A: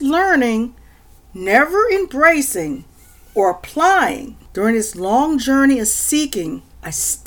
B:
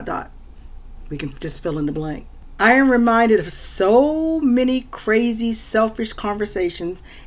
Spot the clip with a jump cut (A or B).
A